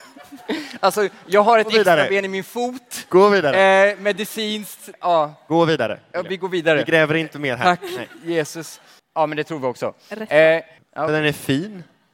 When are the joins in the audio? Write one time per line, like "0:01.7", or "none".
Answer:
0:04.9
0:09.0
0:10.8